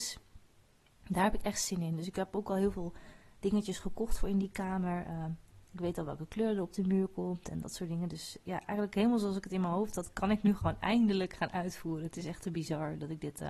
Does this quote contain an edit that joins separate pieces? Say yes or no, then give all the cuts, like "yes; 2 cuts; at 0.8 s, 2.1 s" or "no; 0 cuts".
no; 0 cuts